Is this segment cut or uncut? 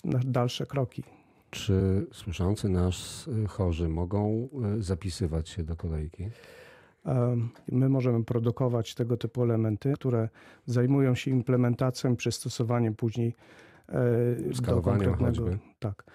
cut